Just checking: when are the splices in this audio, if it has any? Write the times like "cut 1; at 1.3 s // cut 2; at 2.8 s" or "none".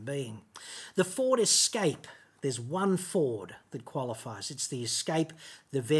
none